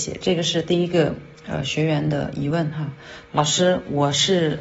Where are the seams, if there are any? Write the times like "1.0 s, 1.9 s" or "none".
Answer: 1.4 s, 3.3 s